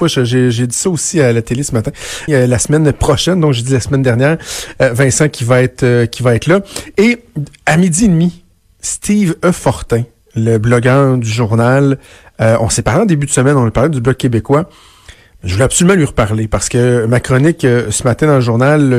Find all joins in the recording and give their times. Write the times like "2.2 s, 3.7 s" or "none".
2.3 s